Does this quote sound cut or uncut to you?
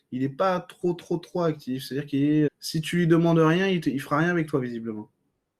cut